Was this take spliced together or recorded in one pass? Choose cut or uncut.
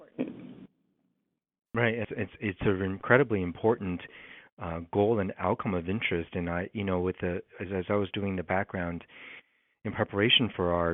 cut